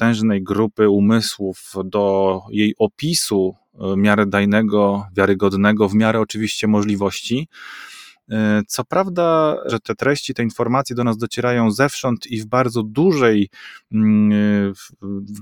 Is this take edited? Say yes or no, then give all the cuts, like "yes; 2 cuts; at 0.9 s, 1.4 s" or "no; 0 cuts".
yes; 1 cut; at 9.7 s